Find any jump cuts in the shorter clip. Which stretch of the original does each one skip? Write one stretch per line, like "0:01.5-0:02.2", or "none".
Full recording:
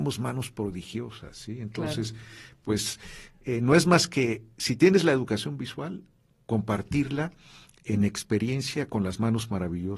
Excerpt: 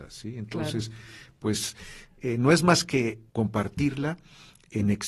0:04.5-0:06.4